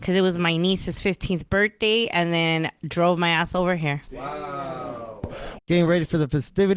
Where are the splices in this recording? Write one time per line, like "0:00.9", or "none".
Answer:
0:05.6